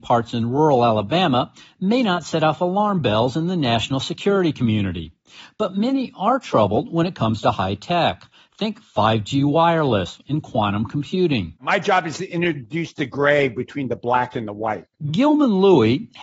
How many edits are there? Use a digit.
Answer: 1